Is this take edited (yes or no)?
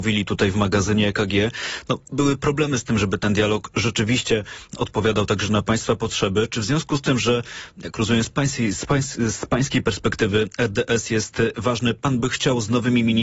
no